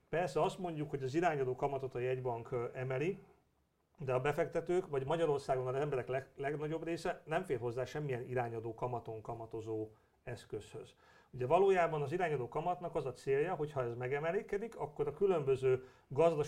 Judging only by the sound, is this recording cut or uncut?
uncut